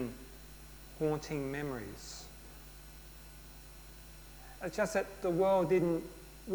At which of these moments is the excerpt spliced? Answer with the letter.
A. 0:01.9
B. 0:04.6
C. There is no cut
B